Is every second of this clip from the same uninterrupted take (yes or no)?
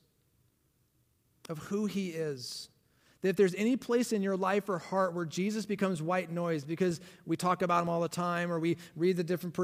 yes